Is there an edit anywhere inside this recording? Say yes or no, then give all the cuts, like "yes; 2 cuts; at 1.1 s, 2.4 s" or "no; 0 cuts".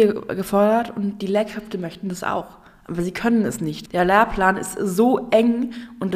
yes; 1 cut; at 3.9 s